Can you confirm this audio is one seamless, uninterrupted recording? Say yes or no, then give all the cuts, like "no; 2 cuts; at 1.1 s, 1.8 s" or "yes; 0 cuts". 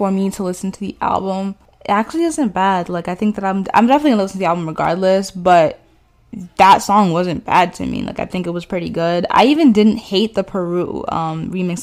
yes; 0 cuts